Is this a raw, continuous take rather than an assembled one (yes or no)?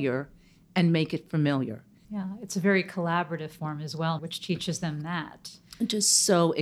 no